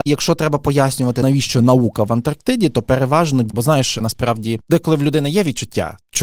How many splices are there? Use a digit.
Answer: 1